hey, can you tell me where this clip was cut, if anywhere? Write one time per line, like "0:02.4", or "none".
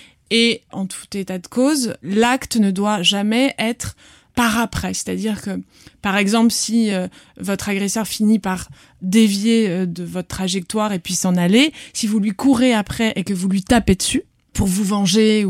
none